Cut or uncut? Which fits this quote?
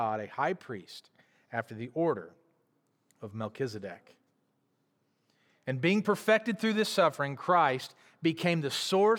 uncut